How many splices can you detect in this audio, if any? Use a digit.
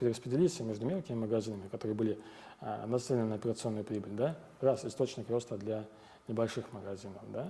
0